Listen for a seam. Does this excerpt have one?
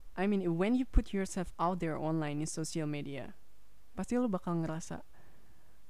no; 0 cuts

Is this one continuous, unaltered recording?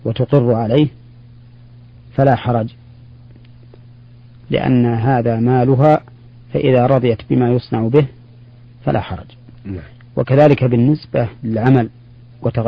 no; 1 cut; at 11.4 s

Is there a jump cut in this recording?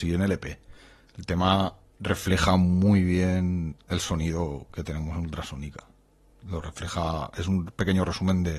no; 0 cuts

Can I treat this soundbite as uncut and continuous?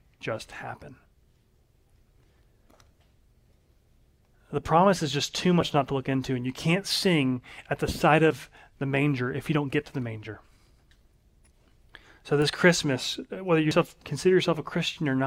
yes; 0 cuts

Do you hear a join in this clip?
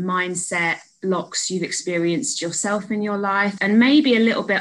yes; 1 cut; at 3.6 s

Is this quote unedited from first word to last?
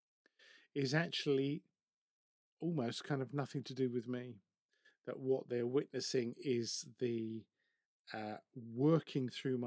yes; 0 cuts

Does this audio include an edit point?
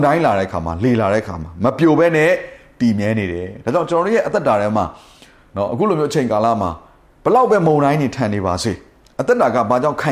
no; 0 cuts

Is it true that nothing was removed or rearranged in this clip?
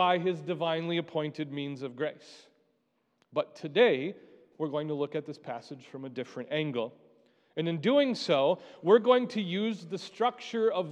yes; 0 cuts

